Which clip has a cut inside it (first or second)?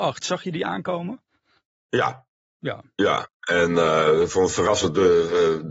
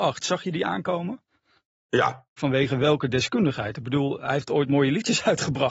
second